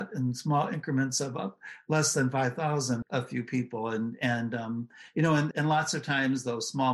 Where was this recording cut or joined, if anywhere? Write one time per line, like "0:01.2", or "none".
0:03.0
0:05.5

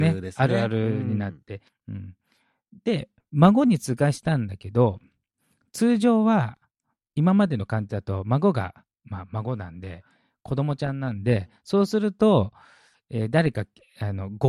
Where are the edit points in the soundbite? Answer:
0:01.7

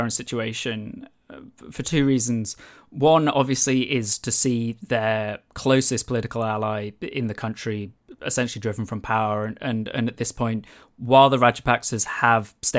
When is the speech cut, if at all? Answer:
none

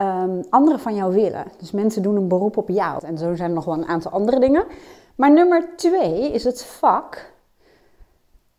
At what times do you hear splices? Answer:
0:03.0

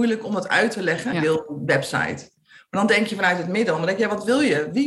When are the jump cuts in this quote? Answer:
0:01.1

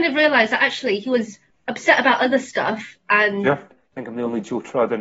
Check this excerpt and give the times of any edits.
0:03.7

